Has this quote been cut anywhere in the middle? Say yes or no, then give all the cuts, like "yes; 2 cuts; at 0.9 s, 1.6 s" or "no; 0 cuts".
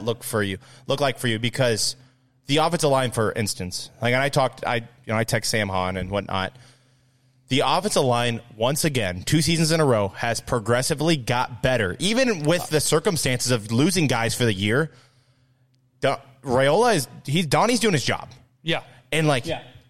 no; 0 cuts